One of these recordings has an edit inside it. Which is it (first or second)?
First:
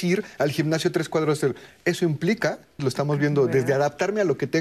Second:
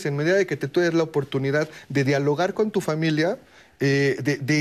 first